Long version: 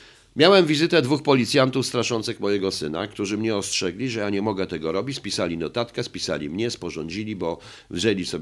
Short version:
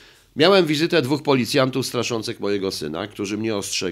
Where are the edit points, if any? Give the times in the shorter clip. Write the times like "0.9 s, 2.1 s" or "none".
none